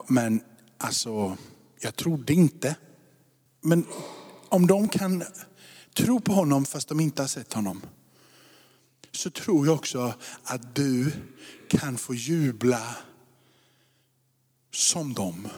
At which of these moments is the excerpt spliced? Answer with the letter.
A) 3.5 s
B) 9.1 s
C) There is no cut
A